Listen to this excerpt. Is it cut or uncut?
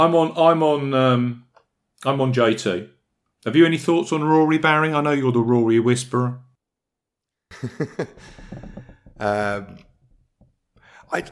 uncut